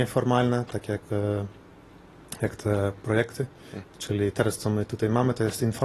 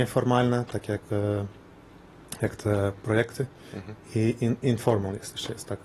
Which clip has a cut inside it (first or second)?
first